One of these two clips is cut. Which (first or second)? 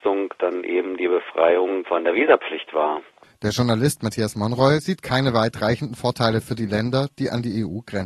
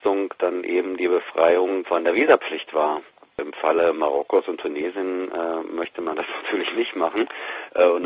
first